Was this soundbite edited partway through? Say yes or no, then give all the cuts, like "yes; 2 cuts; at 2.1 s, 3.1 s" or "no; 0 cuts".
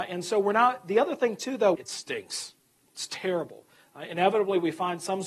yes; 1 cut; at 1.8 s